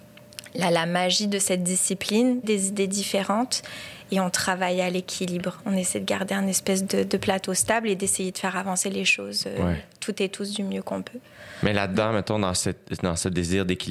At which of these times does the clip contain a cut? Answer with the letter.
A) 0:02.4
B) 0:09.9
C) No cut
A